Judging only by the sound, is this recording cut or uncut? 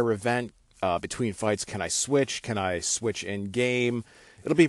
uncut